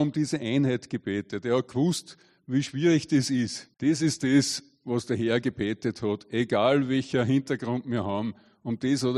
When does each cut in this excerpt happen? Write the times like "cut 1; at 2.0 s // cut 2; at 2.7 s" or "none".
cut 1; at 3.7 s